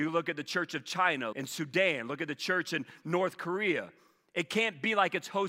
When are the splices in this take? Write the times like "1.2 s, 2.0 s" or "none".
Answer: 1.3 s

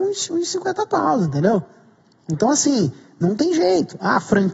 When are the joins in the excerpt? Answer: none

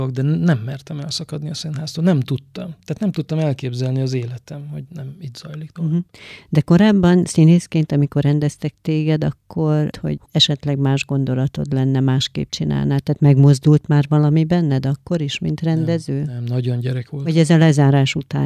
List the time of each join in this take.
9.9 s

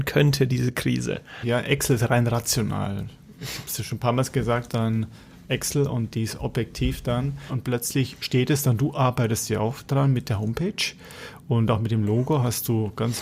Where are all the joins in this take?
1.4 s, 4.7 s, 7.5 s

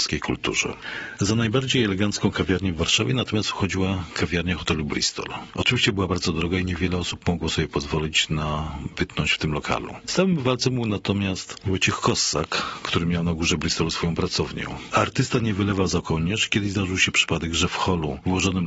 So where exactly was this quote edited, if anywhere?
none

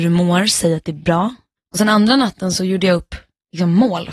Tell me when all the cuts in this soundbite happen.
1.6 s

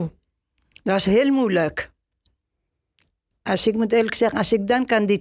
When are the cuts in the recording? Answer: none

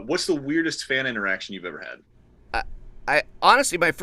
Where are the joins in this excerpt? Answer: 2.5 s

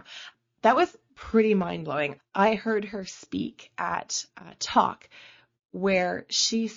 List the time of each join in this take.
2.2 s

